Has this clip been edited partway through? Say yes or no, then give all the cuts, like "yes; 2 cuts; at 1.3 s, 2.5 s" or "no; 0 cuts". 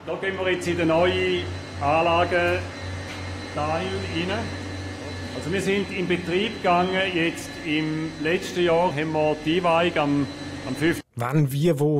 yes; 2 cuts; at 8.9 s, 11.0 s